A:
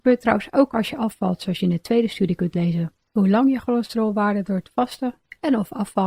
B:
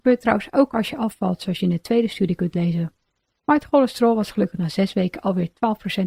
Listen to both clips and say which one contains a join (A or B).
A